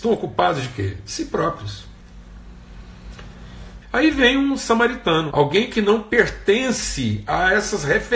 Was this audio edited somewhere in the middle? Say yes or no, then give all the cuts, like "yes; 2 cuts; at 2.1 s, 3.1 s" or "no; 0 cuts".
yes; 2 cuts; at 3.8 s, 5.3 s